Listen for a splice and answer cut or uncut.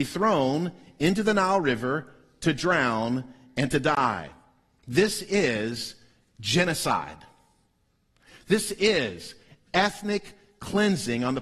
uncut